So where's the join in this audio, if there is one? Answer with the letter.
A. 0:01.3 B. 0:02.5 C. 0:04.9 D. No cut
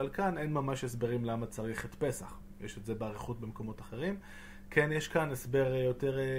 D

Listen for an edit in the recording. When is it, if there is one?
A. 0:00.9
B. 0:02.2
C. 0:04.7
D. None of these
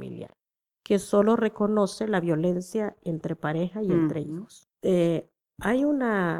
C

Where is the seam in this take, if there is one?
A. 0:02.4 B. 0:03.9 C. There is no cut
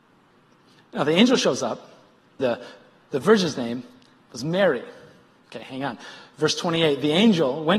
A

